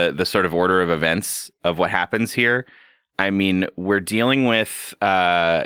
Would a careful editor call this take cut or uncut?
uncut